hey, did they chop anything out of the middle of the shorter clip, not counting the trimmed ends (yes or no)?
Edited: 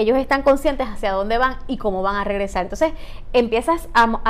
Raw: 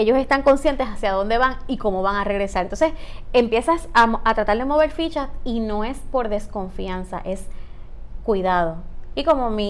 no